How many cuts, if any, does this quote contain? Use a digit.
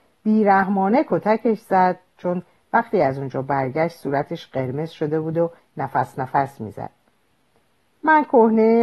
0